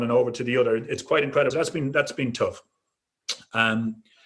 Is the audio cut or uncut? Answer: cut